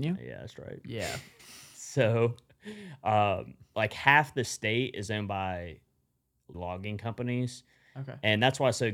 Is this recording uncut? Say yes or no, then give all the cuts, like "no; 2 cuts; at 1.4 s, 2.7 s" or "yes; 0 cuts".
no; 2 cuts; at 1.4 s, 6.5 s